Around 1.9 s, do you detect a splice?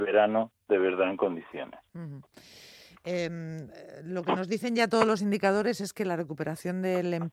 no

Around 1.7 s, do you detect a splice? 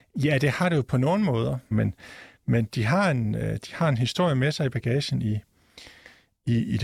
yes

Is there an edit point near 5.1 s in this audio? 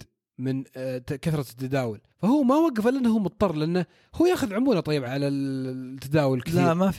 yes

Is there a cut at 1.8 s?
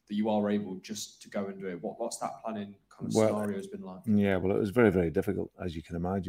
no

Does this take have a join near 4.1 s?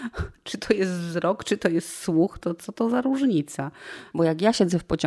yes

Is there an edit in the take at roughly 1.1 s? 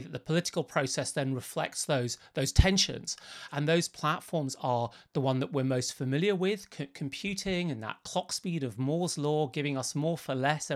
no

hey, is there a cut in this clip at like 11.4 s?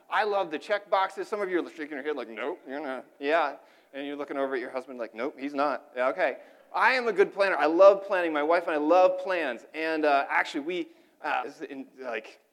yes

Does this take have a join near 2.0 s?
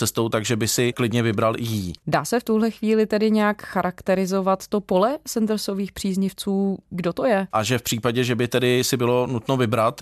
no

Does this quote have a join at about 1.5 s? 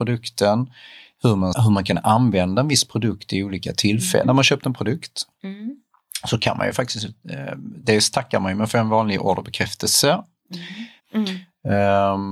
yes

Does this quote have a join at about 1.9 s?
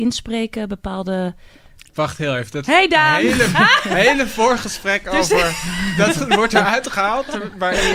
yes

